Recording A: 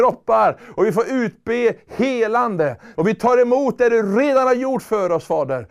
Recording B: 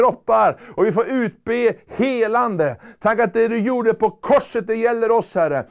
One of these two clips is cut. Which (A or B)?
A